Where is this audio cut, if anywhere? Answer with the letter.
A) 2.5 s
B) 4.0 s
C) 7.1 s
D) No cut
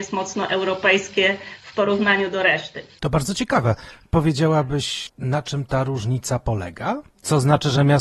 D